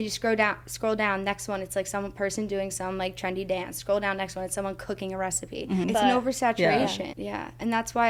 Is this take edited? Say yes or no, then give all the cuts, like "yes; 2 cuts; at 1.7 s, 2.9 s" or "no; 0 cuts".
yes; 2 cuts; at 5.8 s, 7.1 s